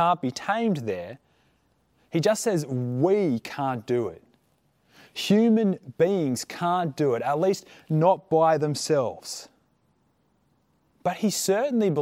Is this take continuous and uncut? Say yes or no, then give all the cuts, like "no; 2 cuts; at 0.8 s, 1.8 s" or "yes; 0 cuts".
yes; 0 cuts